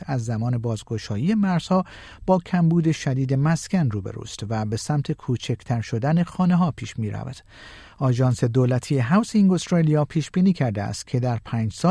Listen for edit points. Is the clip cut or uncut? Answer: uncut